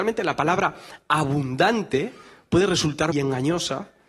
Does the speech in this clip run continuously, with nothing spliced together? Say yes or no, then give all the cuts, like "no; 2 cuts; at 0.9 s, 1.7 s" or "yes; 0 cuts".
no; 1 cut; at 3.1 s